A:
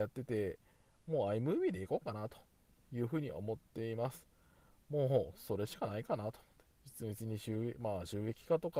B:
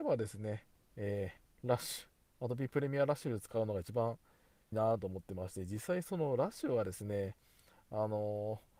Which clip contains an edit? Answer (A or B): B